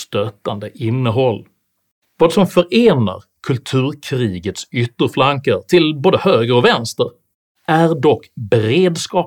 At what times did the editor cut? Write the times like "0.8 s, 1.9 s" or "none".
none